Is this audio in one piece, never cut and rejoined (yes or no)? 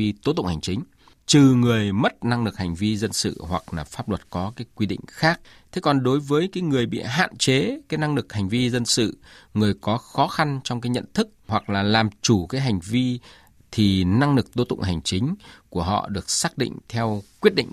yes